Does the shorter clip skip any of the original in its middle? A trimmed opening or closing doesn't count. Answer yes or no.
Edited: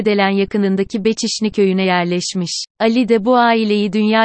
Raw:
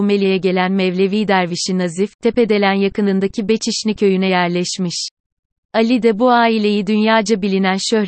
yes